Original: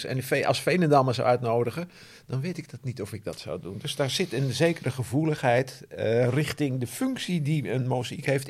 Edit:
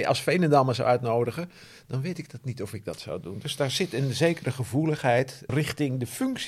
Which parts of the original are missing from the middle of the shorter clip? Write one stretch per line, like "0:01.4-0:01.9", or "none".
0:05.9-0:06.3